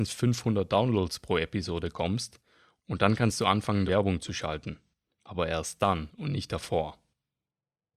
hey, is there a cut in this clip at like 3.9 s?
yes; 1 cut; at 3.9 s

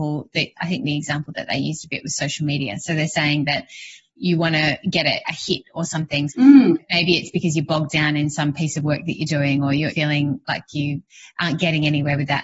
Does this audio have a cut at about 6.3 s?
yes; 2 cuts; at 5.2 s, 6.3 s

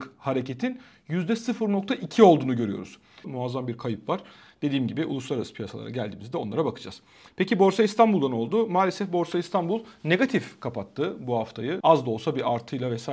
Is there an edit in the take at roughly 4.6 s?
no; 2 cuts; at 3.2 s, 11.8 s

